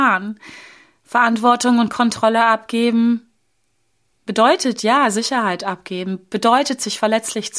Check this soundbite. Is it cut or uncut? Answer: uncut